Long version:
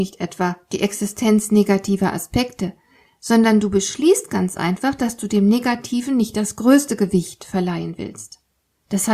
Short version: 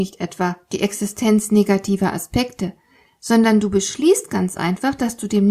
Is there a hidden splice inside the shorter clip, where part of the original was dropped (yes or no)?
no